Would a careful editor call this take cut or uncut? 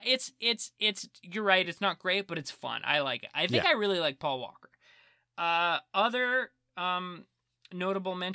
uncut